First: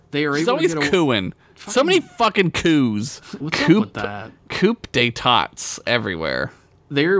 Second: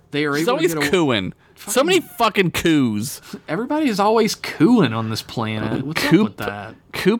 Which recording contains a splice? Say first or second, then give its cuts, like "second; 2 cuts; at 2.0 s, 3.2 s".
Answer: first; 1 cut; at 3.4 s